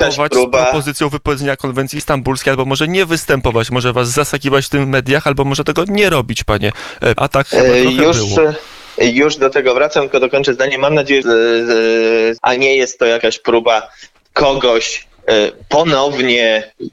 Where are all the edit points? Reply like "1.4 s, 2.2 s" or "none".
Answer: 7.2 s, 11.2 s, 12.4 s